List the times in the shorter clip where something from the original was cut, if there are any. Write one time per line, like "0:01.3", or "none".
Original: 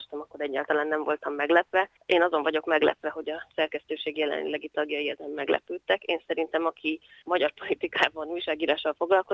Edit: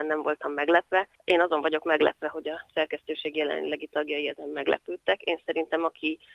none